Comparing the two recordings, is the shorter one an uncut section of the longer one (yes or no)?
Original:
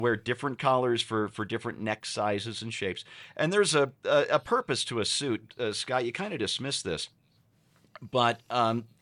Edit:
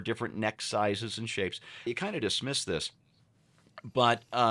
no